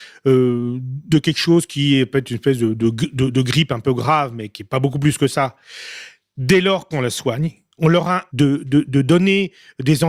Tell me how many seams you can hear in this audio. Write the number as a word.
two